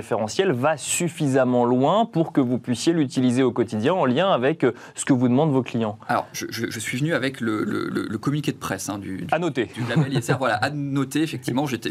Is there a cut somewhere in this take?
no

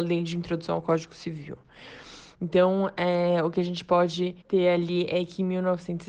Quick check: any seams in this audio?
yes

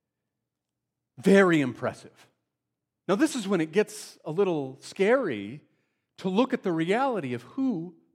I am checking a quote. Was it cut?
yes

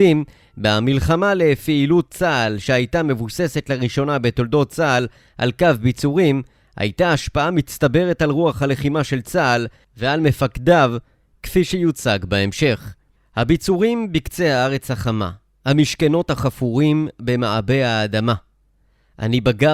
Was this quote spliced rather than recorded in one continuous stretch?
no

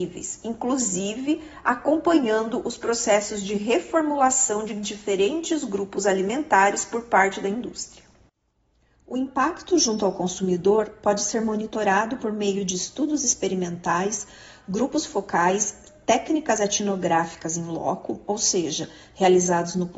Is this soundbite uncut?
yes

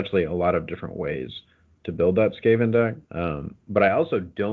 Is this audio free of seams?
no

